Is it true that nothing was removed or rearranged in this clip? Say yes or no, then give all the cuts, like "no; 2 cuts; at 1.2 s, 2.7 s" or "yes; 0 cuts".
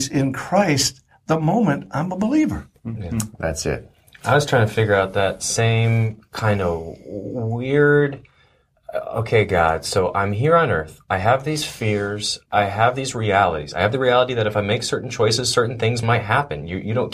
yes; 0 cuts